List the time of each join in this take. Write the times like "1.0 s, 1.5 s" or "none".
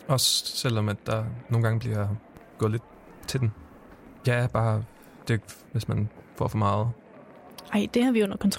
4.2 s, 5.7 s